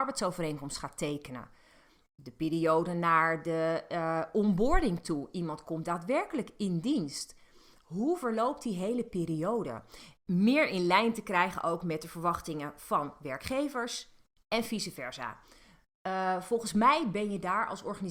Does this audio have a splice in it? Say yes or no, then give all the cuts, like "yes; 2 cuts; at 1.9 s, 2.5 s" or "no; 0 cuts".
yes; 1 cut; at 10.2 s